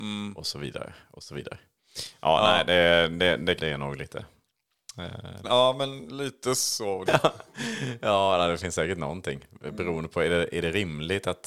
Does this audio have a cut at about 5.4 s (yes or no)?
yes